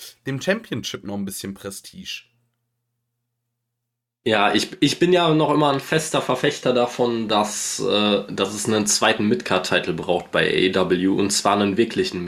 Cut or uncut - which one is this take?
uncut